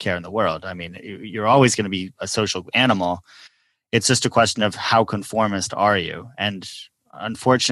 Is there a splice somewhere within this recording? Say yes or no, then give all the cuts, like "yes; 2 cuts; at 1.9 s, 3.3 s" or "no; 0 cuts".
no; 0 cuts